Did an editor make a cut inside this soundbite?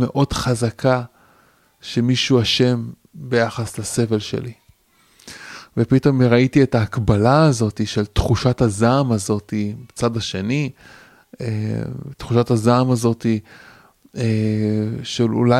no; 0 cuts

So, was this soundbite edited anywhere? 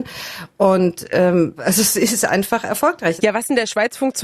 yes; 2 cuts; at 1.6 s, 3.2 s

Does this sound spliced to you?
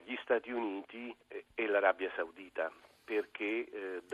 yes; 1 cut; at 1.2 s

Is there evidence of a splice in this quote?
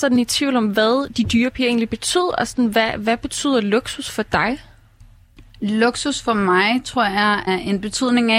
yes; 1 cut; at 7.5 s

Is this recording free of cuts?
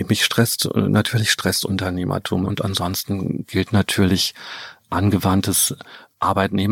no; 1 cut; at 2.5 s

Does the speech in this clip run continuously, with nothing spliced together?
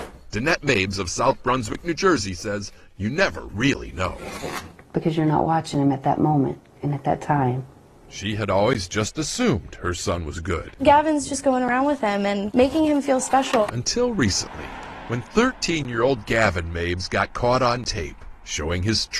no; 2 cuts; at 10.8 s, 13.7 s

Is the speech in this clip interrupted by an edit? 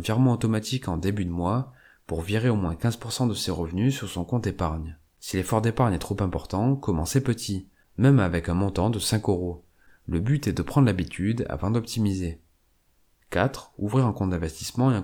no; 0 cuts

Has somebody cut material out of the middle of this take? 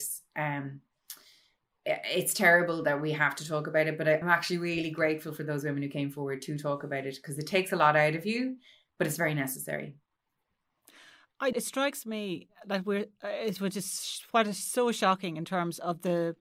yes; 2 cuts; at 4.2 s, 11.5 s

